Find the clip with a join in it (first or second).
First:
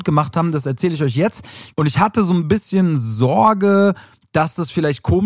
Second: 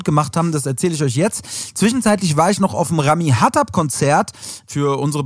first